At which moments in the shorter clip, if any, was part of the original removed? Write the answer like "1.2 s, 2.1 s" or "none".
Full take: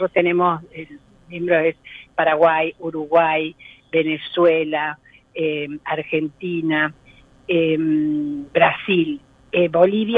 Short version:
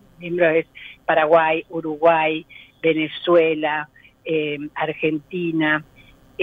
none